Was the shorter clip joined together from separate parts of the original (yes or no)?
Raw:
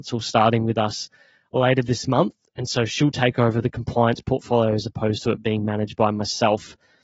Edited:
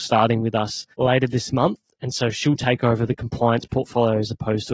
yes